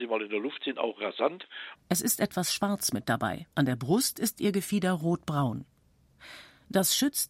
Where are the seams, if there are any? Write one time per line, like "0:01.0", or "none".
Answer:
0:01.8
0:03.5

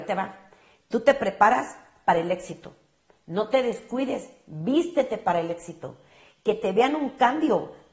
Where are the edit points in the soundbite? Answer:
none

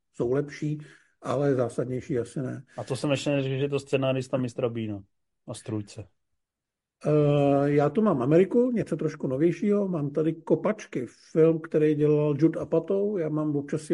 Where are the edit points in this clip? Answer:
0:05.3

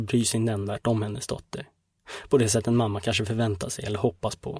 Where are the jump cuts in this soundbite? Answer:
none

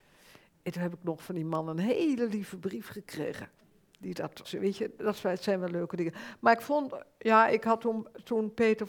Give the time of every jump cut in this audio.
0:04.4

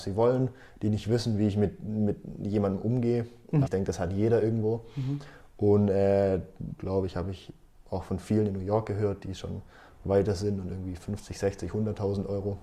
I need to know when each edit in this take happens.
0:03.6
0:06.8

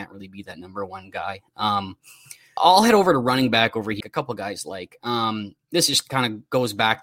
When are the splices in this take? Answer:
0:02.6
0:04.0

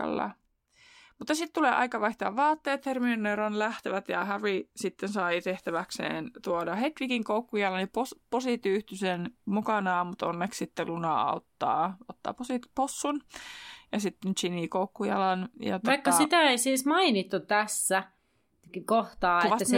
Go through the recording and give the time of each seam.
none

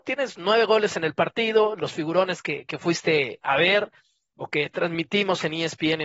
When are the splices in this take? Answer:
none

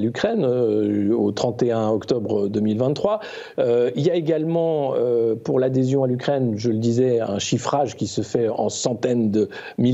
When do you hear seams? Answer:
0:03.5

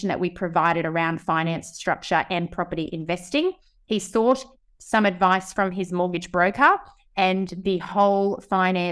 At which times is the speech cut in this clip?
none

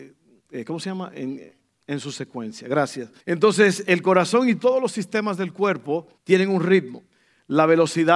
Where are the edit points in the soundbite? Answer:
0:03.2
0:06.2

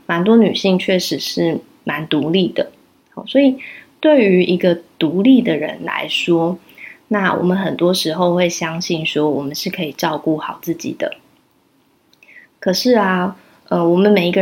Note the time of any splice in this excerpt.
none

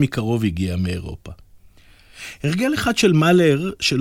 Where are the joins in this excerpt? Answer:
none

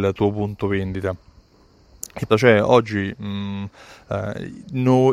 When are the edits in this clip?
0:02.3

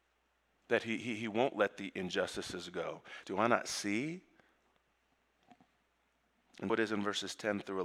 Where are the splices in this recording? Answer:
0:03.2
0:06.7

